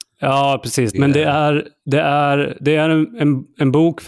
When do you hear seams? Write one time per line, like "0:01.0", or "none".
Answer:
0:00.9